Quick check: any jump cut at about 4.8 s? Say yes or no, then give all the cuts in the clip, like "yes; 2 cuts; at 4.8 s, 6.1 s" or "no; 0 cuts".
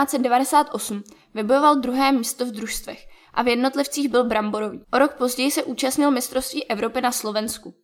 yes; 1 cut; at 4.8 s